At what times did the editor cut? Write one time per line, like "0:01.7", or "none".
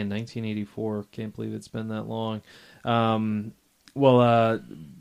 none

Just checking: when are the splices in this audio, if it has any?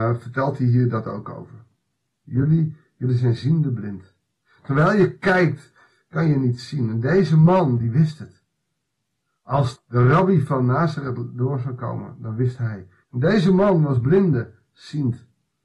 0:09.8
0:13.0

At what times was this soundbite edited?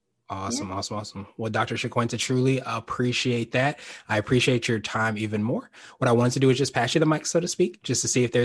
none

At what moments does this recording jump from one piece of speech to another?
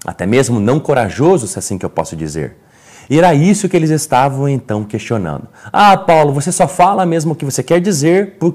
none

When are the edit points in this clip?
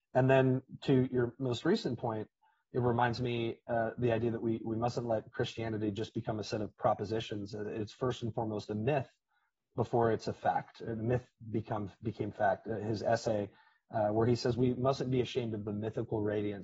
none

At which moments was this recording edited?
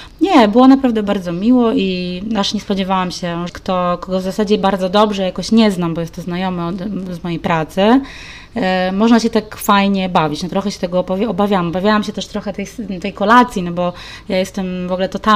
0:03.5

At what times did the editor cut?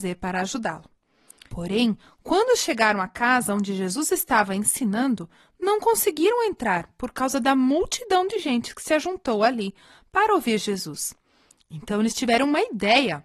0:01.5

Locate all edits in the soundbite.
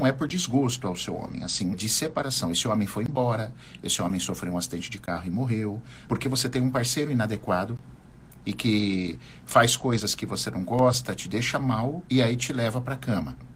0:01.7
0:06.1
0:11.2

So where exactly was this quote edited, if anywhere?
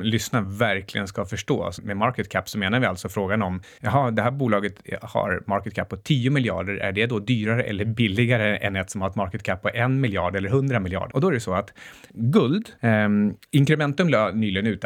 0:01.8
0:11.1

